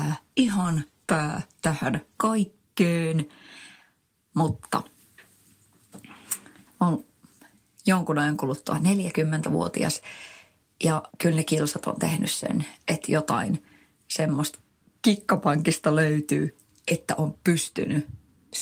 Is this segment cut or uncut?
cut